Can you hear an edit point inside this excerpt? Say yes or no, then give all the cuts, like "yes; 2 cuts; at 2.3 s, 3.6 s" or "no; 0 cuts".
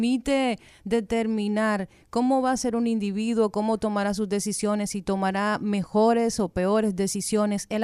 no; 0 cuts